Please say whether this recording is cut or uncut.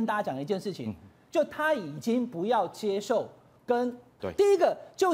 cut